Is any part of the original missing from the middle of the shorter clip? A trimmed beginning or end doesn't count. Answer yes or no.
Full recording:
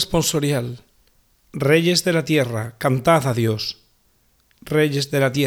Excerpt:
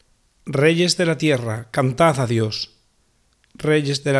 no